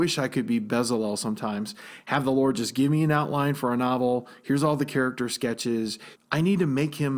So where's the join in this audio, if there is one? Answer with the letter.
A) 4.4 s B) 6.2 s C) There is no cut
B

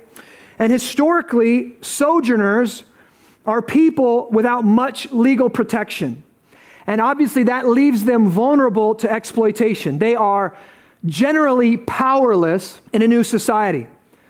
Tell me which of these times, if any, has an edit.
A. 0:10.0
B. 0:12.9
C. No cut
B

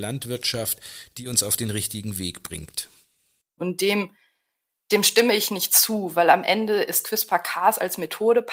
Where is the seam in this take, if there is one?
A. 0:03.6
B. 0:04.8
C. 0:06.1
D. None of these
A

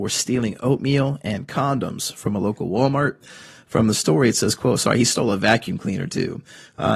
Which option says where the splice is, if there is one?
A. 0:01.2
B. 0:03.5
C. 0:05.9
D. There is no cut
D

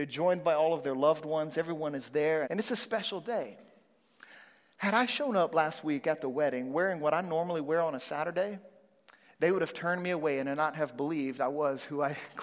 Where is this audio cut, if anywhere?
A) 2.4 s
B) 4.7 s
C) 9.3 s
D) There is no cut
A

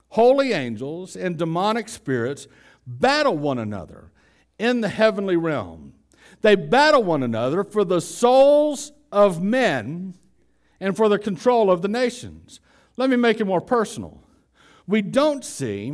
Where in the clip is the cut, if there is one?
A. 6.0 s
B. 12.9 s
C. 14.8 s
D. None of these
C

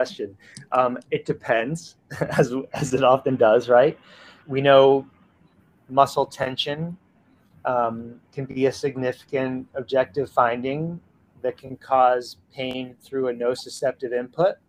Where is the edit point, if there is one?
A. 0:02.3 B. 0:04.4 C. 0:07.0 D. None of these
B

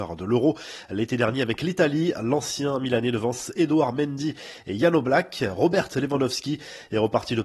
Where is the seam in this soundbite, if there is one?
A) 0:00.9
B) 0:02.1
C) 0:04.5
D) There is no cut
D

